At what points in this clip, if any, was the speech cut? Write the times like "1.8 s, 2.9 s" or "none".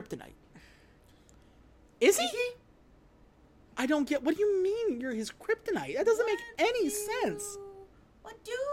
3.7 s